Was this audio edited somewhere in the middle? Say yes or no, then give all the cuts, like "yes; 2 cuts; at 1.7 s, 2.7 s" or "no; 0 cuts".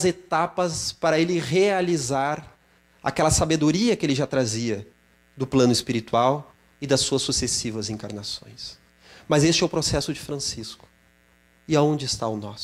no; 0 cuts